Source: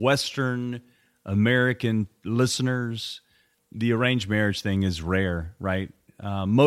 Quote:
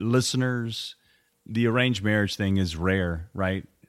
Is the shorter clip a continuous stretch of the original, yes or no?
yes